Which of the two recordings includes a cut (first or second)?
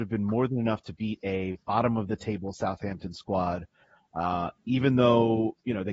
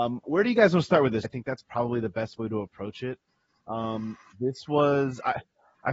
second